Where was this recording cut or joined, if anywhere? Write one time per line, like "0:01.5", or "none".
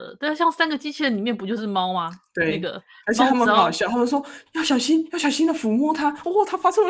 0:04.5